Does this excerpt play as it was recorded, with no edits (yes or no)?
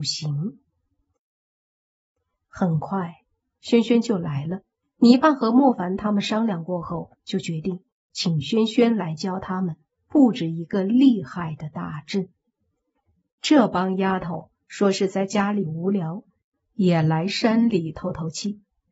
no